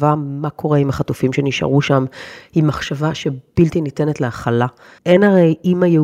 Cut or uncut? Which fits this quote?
cut